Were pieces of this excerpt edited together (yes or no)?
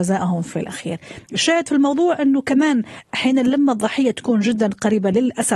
no